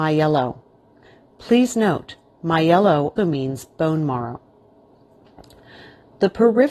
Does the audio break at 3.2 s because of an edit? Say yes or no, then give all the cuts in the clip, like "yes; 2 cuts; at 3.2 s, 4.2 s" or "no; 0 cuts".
yes; 1 cut; at 3.2 s